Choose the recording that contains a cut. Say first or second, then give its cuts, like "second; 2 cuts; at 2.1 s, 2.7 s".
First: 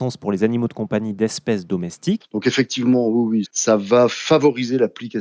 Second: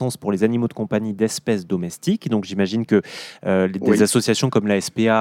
first; 2 cuts; at 2.2 s, 3.4 s